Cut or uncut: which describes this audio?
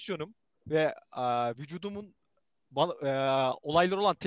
uncut